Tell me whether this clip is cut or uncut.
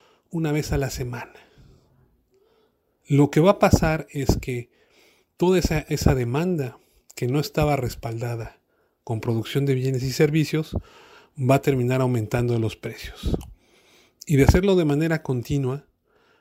uncut